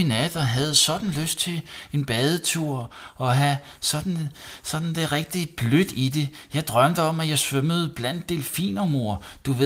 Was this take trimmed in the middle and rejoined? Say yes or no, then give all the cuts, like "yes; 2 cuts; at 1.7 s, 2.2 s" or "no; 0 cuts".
no; 0 cuts